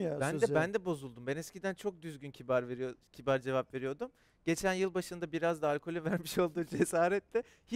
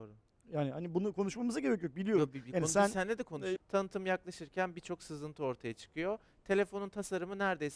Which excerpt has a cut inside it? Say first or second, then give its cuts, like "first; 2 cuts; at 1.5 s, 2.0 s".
second; 1 cut; at 3.6 s